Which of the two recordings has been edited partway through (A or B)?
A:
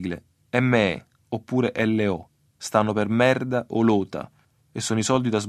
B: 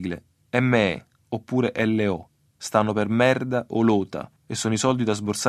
B